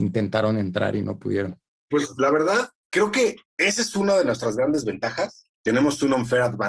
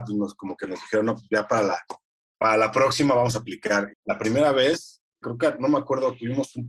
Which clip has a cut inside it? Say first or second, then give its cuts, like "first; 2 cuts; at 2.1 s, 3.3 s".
second; 2 cuts; at 3.9 s, 5.2 s